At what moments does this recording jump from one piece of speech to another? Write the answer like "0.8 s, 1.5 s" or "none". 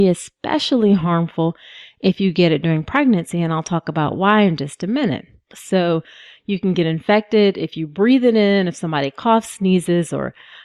5.5 s